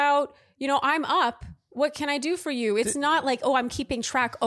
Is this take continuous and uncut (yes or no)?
yes